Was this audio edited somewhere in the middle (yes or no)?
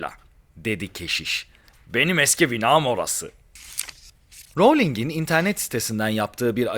no